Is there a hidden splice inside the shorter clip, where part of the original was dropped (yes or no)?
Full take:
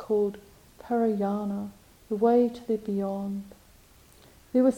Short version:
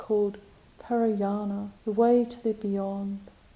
yes